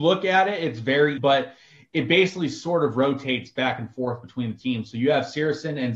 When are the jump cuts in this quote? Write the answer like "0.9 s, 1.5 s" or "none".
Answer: 1.2 s